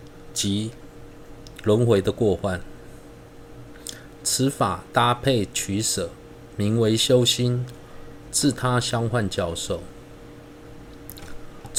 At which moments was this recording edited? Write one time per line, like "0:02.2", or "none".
0:04.2
0:08.3